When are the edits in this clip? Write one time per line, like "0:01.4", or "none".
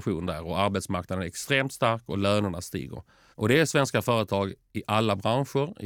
0:03.3

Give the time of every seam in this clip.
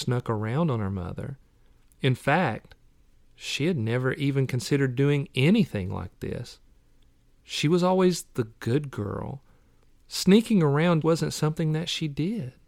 0:11.0

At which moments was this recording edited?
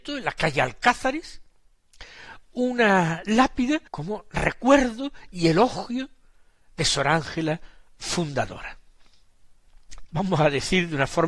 0:03.9
0:10.1

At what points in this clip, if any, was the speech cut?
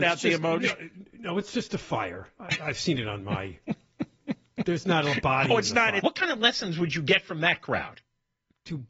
0:06.0

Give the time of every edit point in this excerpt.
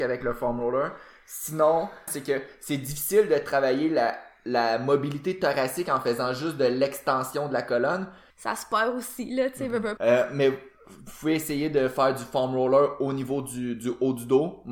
0:02.1
0:08.3
0:10.0

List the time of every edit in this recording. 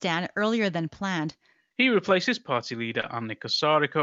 0:01.7

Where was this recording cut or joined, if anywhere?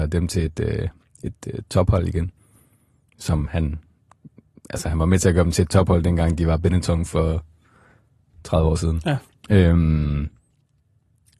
none

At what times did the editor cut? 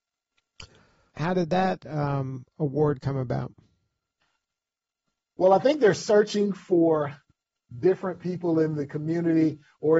0:01.1

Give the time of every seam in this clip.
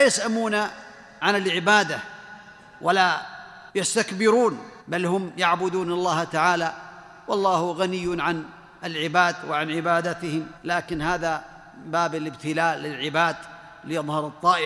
0:03.7
0:04.8
0:10.6

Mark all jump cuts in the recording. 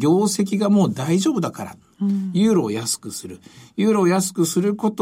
0:01.9

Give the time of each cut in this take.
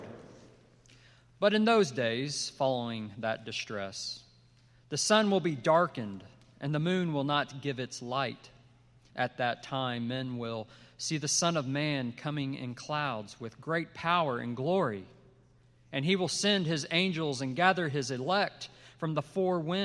0:09.1

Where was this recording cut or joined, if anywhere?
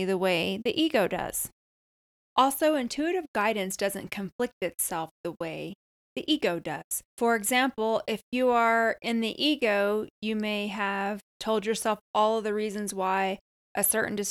0:07.1
0:11.3

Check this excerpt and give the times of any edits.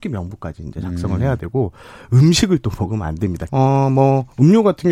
0:03.5

